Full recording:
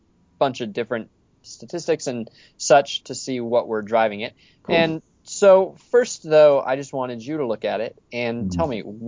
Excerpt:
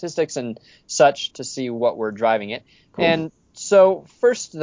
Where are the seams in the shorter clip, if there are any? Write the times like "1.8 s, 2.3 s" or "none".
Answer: none